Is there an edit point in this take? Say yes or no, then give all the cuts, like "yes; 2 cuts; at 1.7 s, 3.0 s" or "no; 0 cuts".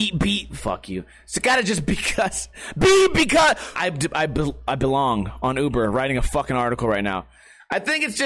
yes; 1 cut; at 3.8 s